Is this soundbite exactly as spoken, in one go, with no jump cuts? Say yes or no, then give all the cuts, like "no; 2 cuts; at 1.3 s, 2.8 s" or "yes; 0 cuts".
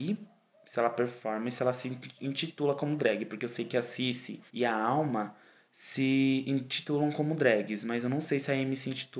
no; 1 cut; at 4.5 s